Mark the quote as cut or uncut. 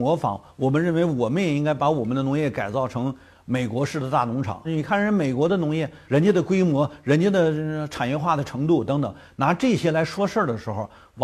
cut